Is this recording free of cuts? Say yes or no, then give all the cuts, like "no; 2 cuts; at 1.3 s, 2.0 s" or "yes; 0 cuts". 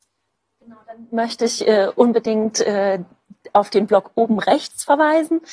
yes; 0 cuts